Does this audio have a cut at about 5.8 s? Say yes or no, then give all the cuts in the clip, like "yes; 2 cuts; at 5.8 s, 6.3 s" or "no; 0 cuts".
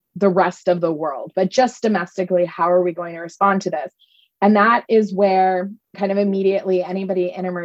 yes; 1 cut; at 5.8 s